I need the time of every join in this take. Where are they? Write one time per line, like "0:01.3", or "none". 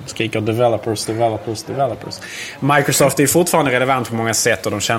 none